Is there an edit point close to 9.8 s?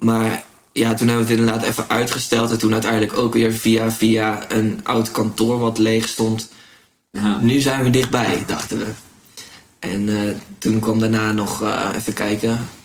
no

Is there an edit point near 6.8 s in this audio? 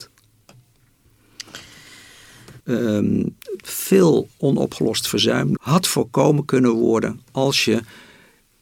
no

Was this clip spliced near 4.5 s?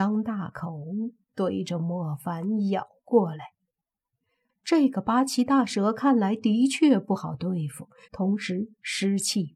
yes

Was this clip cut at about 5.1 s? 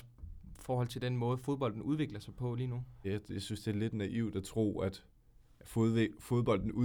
no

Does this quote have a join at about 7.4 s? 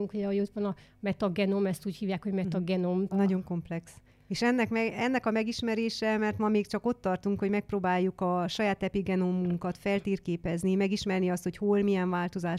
no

